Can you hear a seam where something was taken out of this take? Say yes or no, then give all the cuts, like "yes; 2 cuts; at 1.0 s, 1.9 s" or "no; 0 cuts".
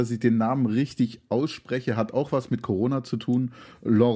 no; 0 cuts